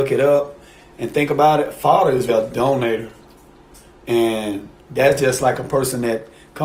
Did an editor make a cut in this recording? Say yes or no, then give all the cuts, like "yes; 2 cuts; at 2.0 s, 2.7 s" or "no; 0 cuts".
yes; 1 cut; at 2.3 s